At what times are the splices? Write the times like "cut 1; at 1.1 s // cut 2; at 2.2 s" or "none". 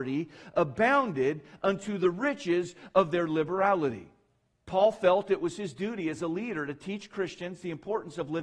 cut 1; at 4.5 s